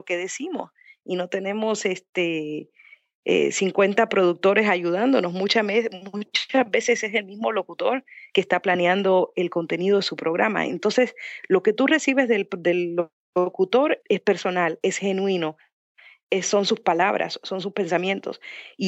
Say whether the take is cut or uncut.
cut